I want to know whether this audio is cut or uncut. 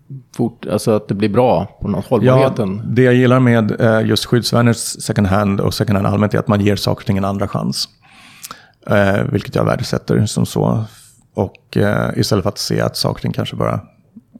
uncut